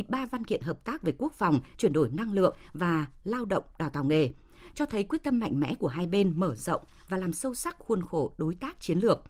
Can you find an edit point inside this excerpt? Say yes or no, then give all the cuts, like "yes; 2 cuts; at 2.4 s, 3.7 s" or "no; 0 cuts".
no; 0 cuts